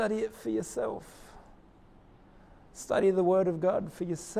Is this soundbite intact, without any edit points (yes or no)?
yes